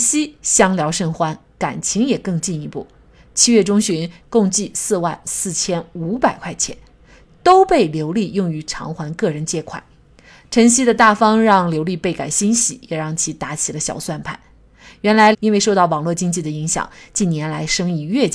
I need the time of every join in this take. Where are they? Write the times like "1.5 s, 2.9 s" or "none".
4.2 s, 15.3 s